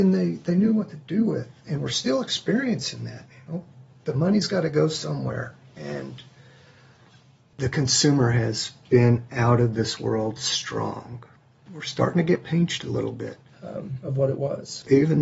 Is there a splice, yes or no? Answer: yes